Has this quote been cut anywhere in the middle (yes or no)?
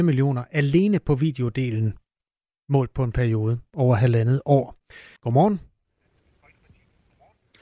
yes